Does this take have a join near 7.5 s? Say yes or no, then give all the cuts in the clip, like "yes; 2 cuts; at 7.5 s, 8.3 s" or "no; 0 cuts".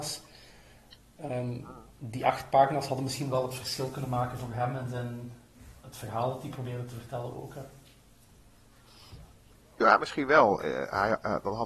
no; 1 cut; at 10.6 s